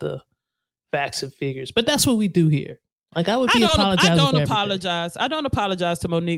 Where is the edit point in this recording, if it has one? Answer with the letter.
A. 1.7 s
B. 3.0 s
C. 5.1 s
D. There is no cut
D